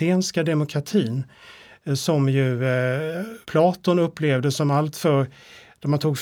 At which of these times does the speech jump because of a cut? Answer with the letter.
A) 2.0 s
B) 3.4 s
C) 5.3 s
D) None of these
B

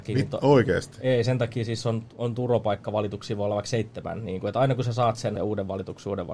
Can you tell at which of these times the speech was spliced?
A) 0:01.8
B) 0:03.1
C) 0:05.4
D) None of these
C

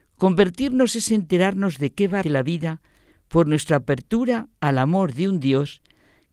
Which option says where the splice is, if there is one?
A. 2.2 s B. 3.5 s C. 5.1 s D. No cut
A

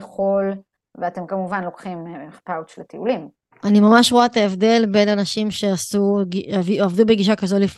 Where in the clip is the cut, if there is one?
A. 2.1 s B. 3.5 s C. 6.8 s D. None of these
B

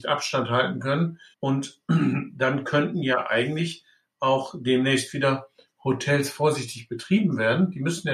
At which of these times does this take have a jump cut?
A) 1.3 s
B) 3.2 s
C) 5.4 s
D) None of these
A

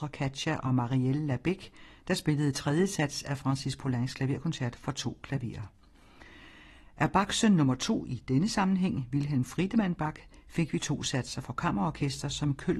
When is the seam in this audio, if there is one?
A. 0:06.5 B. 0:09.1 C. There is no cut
C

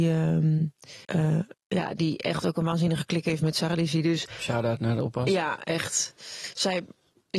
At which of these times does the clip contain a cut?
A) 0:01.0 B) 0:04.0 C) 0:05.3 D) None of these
A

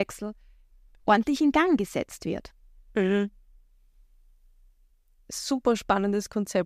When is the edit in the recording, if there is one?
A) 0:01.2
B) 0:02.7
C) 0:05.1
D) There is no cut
D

